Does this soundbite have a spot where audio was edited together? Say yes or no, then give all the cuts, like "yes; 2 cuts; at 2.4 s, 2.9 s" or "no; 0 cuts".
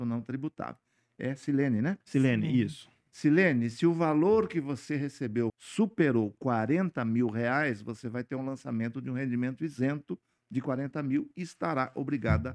yes; 1 cut; at 5.5 s